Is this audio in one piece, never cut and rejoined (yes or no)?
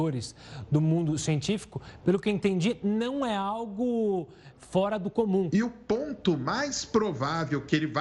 no